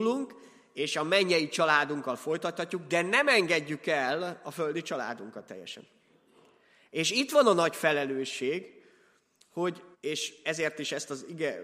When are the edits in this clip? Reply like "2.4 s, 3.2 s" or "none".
9.9 s